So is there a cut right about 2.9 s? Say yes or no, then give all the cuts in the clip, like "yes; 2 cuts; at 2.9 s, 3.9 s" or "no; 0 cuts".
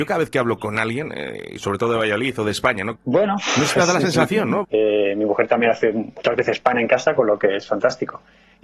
yes; 2 cuts; at 2.9 s, 4.6 s